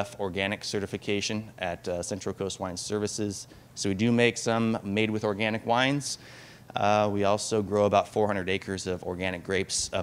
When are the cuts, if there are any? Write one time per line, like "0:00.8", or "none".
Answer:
none

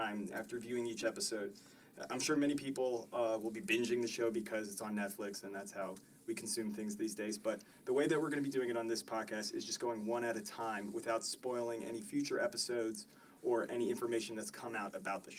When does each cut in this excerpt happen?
none

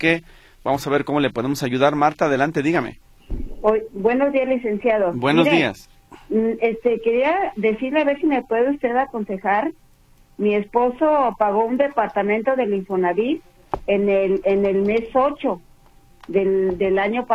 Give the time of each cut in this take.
none

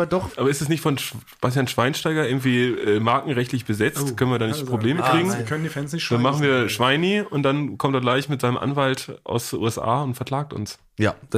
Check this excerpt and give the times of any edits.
none

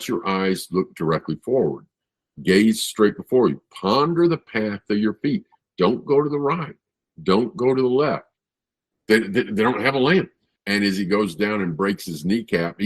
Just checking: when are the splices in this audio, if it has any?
0:08.9
0:10.6

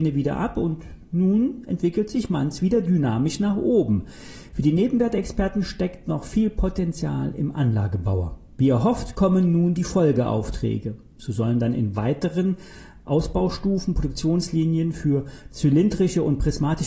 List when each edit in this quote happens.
0:11.2

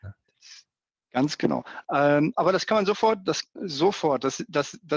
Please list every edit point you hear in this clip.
0:01.8
0:03.6

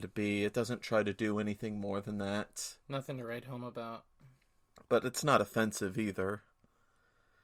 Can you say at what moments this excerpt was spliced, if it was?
none

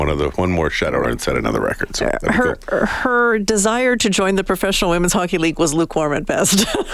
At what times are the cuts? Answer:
0:01.0

